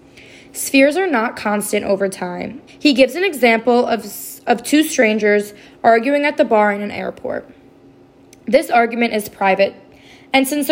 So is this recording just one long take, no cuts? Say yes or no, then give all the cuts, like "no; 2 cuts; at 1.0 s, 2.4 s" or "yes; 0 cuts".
no; 1 cut; at 2.7 s